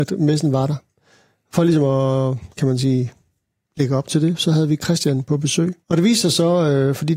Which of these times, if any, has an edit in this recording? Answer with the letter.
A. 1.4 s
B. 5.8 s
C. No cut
B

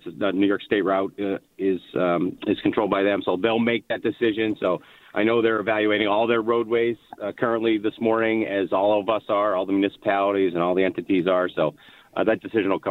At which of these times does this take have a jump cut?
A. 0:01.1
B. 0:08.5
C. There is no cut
C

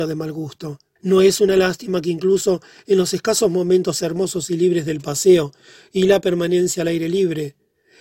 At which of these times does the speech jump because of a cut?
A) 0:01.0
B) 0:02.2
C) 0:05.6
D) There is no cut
A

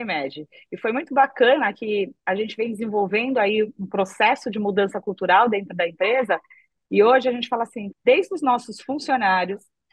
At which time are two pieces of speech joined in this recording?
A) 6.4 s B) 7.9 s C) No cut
B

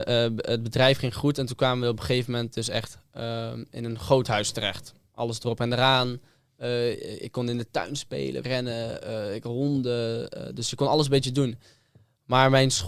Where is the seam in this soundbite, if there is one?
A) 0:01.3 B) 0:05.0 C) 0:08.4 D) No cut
C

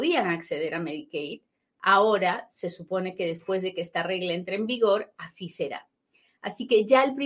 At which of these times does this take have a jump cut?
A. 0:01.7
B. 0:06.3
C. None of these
C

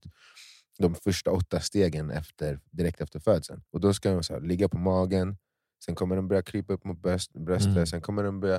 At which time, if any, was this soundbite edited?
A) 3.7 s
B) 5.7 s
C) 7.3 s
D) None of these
A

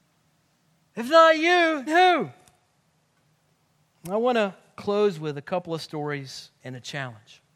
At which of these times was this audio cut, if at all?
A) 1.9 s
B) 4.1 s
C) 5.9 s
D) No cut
A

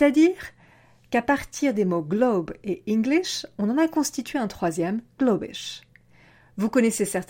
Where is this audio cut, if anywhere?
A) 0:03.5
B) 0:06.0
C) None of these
C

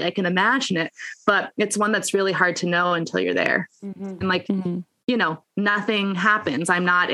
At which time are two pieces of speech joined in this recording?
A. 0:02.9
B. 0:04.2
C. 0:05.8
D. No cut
B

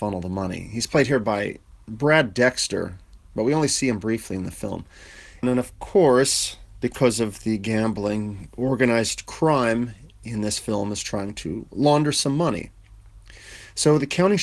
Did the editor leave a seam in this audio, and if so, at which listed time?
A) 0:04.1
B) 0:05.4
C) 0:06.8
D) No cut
B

